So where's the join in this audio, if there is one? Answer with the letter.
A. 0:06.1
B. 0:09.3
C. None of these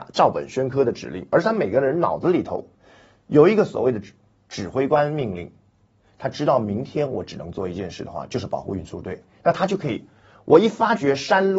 C